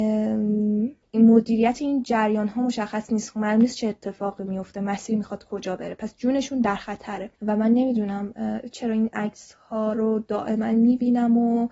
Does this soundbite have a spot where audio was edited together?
yes; 2 cuts; at 1.0 s, 7.3 s

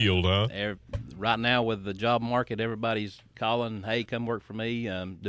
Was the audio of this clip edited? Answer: yes; 1 cut; at 4.1 s

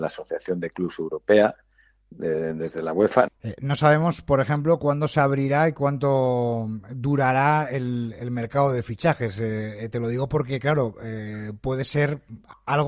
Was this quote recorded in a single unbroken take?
no; 1 cut; at 3.3 s

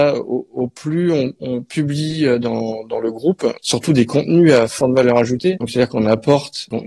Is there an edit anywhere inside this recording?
yes; 1 cut; at 3.6 s

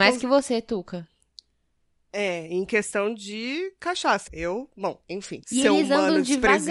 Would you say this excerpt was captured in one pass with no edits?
no; 2 cuts; at 4.3 s, 5.4 s

